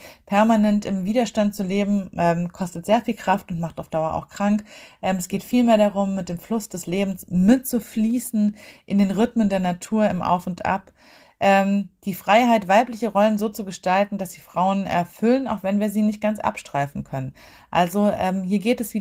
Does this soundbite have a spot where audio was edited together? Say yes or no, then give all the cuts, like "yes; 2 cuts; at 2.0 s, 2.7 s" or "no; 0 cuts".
no; 0 cuts